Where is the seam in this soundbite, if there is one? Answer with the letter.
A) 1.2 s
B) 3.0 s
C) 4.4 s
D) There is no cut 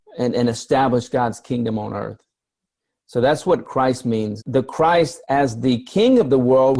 C